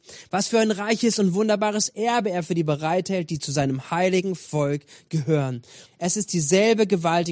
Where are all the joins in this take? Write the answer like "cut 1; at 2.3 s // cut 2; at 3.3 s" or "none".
cut 1; at 5.9 s

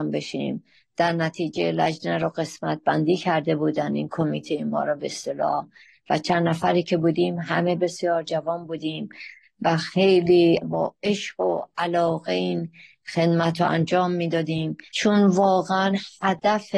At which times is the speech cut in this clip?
cut 1; at 7.8 s

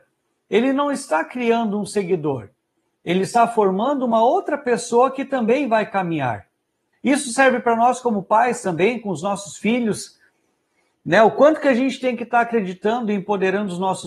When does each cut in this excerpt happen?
cut 1; at 6.9 s

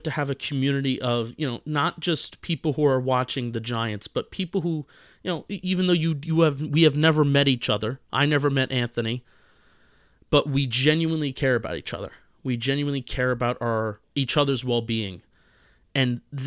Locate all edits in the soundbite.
none

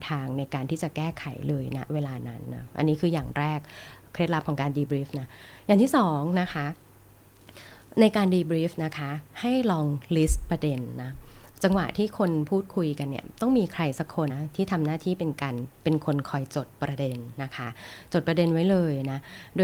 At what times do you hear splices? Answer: cut 1; at 14.3 s

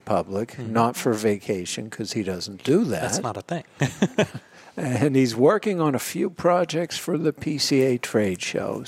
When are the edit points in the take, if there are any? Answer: none

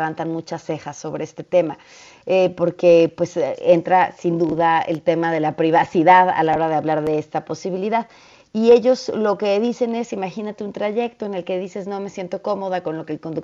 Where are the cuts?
none

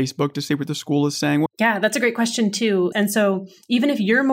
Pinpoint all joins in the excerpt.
cut 1; at 1.5 s // cut 2; at 2.9 s

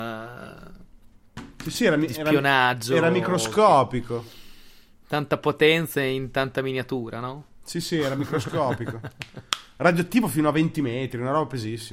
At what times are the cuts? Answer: none

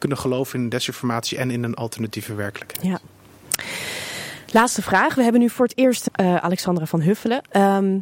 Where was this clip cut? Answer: cut 1; at 6.1 s

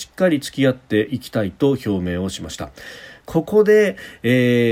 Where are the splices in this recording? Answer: cut 1; at 3.2 s

